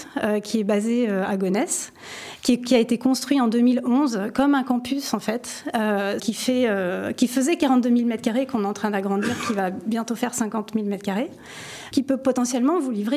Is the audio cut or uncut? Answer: cut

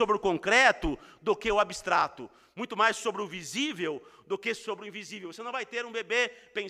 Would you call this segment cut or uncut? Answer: uncut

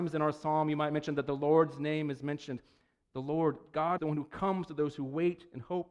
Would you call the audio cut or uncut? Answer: cut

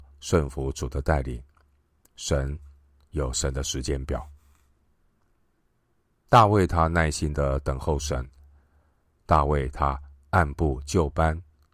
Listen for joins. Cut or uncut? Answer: uncut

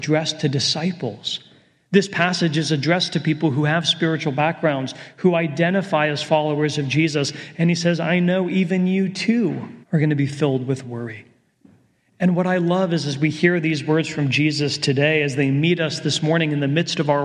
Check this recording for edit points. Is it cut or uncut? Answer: cut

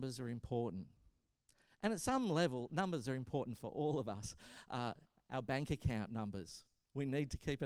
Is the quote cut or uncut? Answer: uncut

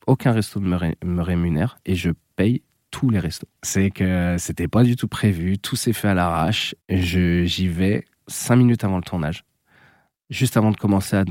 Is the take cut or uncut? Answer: cut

